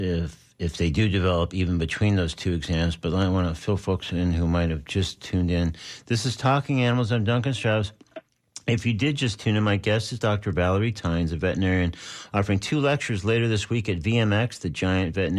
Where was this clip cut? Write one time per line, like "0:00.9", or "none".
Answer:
none